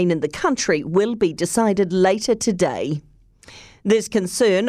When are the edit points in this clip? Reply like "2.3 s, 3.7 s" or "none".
none